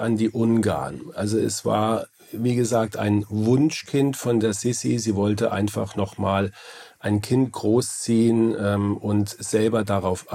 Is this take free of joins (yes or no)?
yes